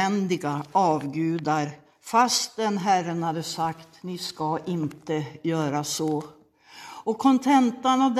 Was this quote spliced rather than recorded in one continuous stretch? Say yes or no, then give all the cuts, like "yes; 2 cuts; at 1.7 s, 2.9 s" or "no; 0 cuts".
no; 0 cuts